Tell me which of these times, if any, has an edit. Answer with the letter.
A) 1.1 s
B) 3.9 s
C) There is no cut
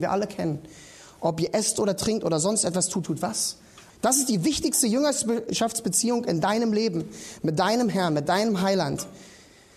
B